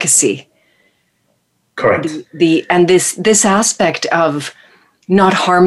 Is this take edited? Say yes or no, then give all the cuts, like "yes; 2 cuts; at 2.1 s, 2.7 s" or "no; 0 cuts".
no; 0 cuts